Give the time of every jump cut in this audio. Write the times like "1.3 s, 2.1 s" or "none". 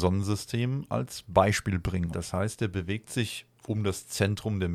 2.1 s